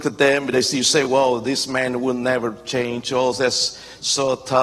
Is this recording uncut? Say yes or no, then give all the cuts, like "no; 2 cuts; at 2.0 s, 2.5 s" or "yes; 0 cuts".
yes; 0 cuts